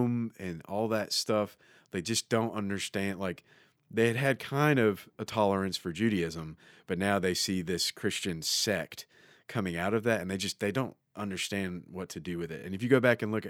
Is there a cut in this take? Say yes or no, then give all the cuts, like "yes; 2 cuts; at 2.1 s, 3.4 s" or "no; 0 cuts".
no; 0 cuts